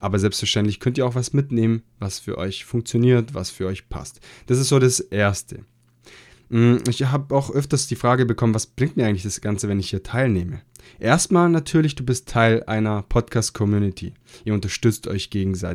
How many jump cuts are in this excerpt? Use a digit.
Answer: 0